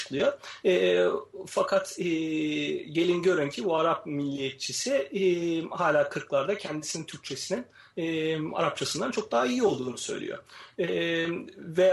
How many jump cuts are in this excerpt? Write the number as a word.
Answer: zero